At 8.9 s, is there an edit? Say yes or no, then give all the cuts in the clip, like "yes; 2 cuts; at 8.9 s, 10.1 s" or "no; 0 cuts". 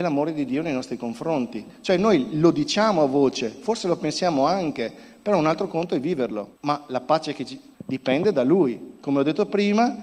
yes; 3 cuts; at 6.5 s, 7.7 s, 8.9 s